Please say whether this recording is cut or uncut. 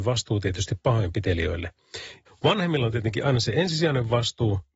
cut